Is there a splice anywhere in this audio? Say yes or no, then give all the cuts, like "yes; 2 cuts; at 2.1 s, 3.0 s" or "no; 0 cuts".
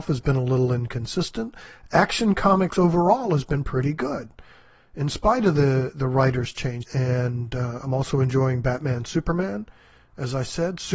yes; 1 cut; at 6.8 s